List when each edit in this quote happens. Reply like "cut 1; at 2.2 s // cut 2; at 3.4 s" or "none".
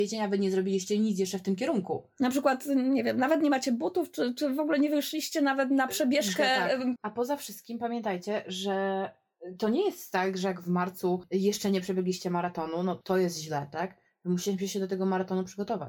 cut 1; at 7.0 s